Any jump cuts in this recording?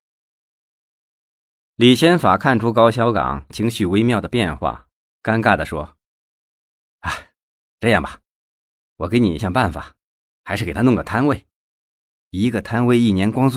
yes; 1 cut; at 9.4 s

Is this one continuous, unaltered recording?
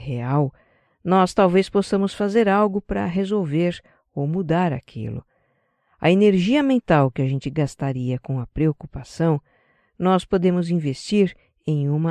yes; 0 cuts

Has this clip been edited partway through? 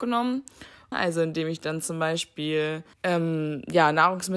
yes; 2 cuts; at 0.9 s, 2.9 s

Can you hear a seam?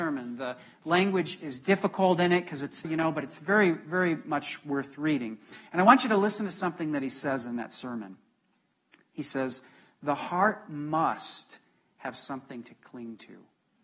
yes; 1 cut; at 2.8 s

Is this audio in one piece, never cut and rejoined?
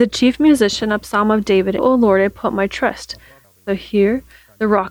no; 2 cuts; at 1.8 s, 3.4 s

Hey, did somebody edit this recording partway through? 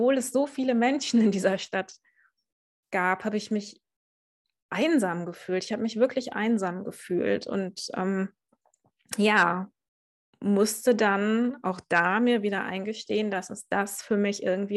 no; 0 cuts

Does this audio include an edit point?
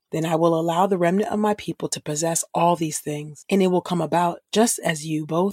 no; 0 cuts

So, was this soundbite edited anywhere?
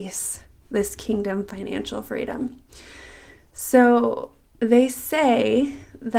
no; 0 cuts

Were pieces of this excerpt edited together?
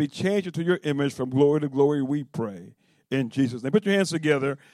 no; 0 cuts

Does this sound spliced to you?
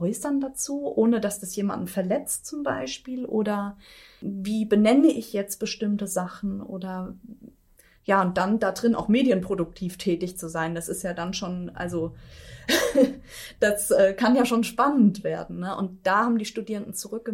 no; 0 cuts

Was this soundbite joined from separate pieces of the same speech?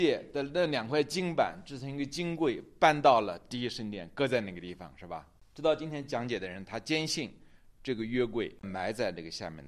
no; 0 cuts

